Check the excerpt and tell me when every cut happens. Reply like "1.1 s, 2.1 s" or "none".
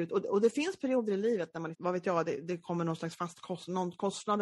1.7 s